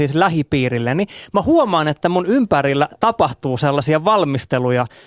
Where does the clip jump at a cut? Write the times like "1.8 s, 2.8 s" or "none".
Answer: none

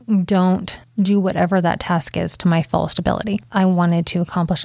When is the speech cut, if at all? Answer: 3.5 s

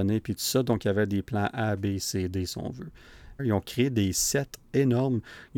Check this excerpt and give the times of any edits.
3.4 s

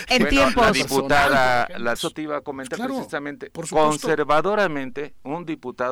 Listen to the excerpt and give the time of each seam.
2.0 s

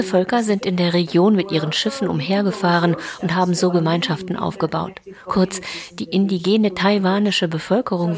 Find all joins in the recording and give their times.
none

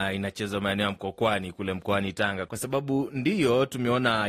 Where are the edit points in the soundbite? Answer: 2.5 s

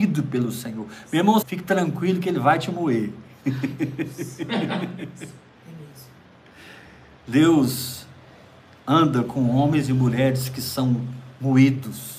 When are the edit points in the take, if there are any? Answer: 1.4 s

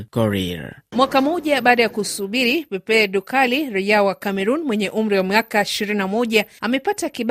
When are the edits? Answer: none

